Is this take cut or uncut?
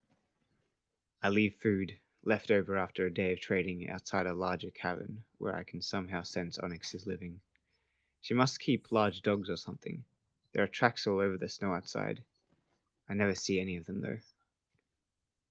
uncut